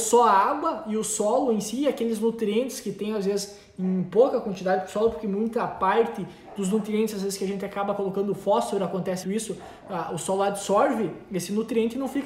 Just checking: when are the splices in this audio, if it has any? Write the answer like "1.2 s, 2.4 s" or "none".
9.2 s